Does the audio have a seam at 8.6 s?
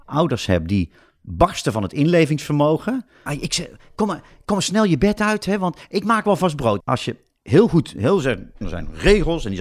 yes; 3 cuts; at 3.3 s, 6.8 s, 8.6 s

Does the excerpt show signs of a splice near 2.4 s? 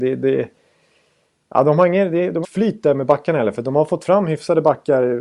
yes; 1 cut; at 2.4 s

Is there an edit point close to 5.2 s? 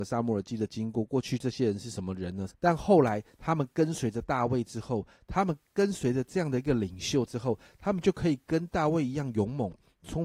no; 1 cut; at 2.5 s

